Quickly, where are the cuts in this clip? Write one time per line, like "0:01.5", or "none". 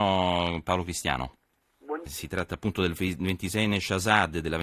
0:02.1